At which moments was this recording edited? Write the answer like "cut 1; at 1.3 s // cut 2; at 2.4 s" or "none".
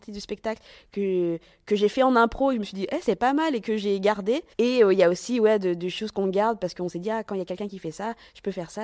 cut 1; at 4.5 s